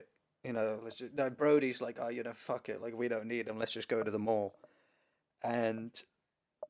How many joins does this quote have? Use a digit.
0